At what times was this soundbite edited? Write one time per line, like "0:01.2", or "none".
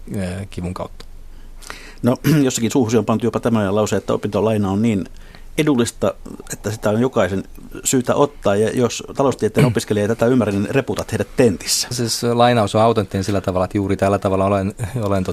0:11.9

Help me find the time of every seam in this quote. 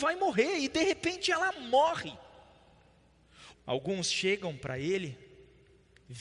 0:03.5

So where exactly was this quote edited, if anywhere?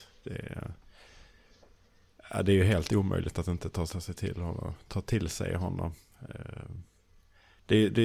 0:03.9

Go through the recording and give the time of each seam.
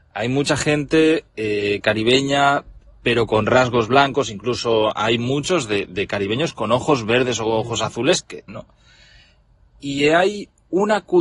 0:08.5

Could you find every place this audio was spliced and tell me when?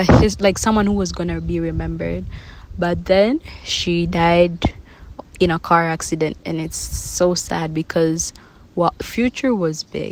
0:09.0

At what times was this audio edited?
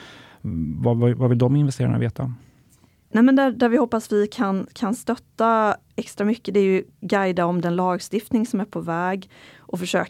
none

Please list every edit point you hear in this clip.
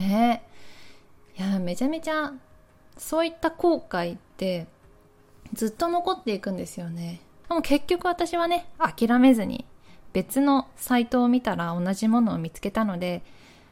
0:07.4

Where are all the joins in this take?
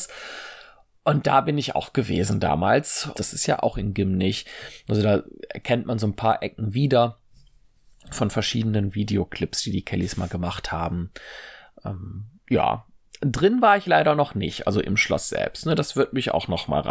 0:03.1

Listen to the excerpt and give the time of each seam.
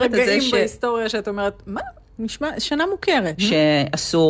0:02.2
0:03.4

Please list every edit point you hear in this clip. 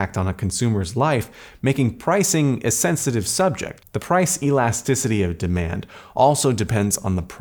0:03.8

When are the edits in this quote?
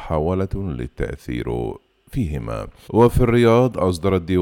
0:02.8

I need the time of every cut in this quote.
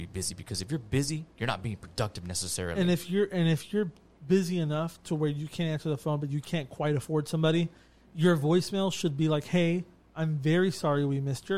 none

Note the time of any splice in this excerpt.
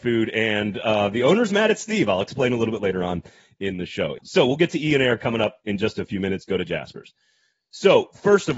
0:04.2

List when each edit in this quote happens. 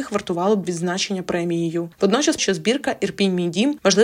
0:02.4

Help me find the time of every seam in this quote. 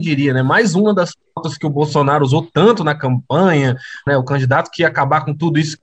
0:04.1

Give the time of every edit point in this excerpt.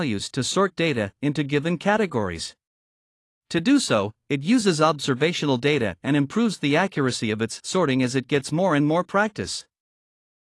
none

